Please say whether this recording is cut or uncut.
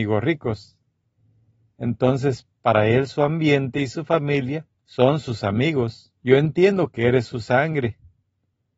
cut